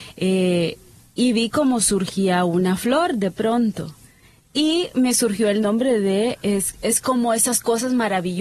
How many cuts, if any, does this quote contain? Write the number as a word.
zero